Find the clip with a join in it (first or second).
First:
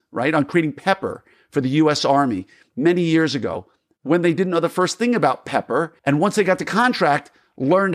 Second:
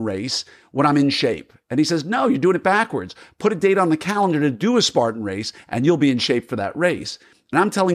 first